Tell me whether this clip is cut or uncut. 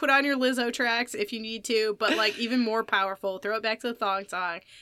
uncut